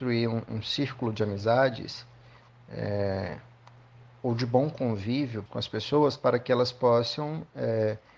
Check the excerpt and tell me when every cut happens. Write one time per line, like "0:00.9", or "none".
0:05.5